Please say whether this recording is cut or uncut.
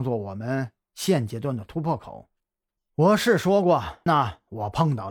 cut